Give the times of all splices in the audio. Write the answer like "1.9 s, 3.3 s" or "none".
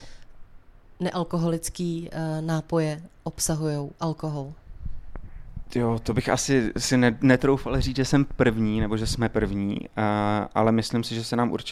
none